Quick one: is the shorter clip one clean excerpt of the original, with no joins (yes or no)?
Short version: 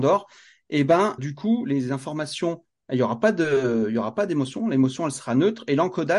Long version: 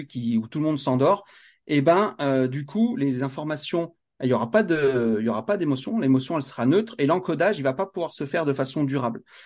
no